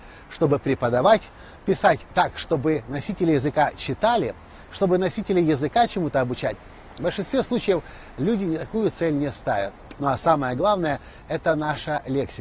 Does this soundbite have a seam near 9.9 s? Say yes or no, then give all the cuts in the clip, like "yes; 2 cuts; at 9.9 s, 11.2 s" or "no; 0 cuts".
yes; 1 cut; at 9.9 s